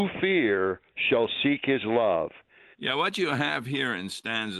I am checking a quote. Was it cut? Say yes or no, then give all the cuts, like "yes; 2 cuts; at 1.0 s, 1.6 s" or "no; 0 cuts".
yes; 1 cut; at 2.7 s